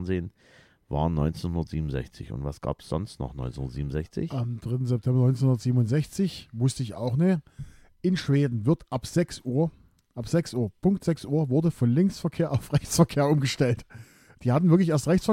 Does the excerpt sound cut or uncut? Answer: uncut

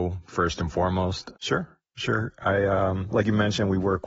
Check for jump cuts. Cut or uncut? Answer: cut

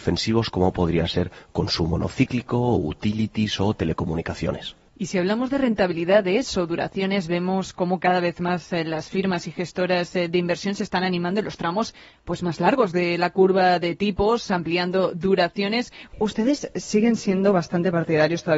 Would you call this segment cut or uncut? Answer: cut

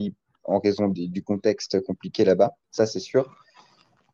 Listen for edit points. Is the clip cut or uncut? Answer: cut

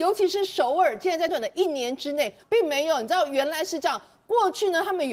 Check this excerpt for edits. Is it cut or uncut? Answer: cut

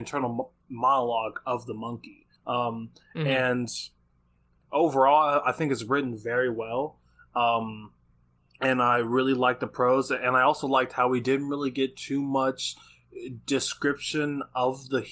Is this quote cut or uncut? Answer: cut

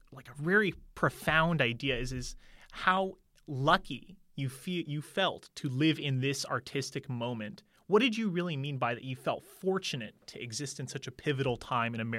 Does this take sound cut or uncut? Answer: uncut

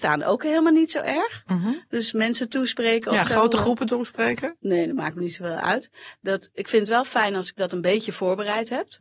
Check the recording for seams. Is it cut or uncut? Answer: uncut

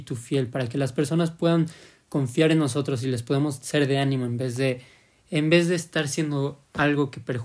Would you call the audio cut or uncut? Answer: uncut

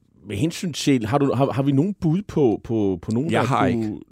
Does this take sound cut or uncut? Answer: uncut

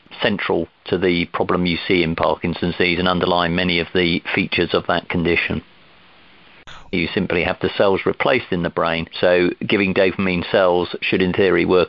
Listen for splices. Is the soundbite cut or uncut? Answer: cut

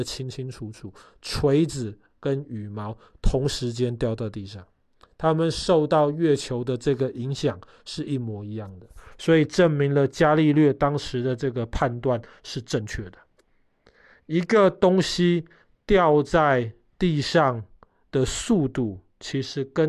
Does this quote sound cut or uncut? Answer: uncut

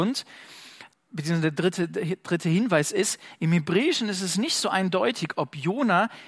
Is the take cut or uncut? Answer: cut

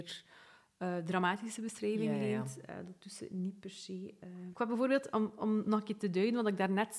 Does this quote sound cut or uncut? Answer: uncut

